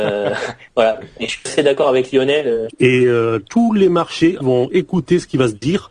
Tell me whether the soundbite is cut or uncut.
cut